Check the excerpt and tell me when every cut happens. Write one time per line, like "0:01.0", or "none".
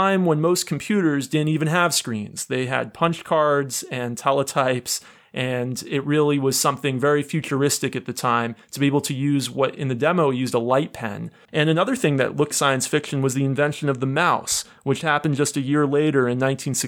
0:11.5
0:12.5